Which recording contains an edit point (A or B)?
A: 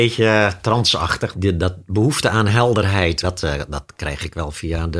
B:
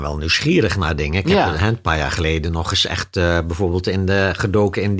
A